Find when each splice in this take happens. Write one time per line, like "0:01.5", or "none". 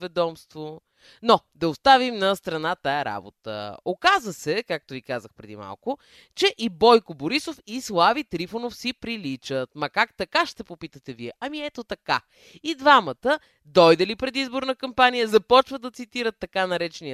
none